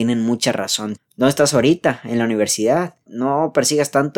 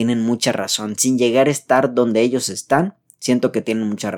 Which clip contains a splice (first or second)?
first